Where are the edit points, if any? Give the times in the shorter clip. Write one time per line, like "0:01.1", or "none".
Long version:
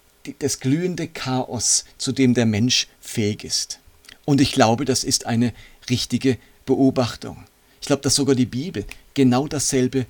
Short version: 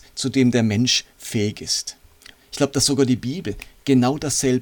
0:02.3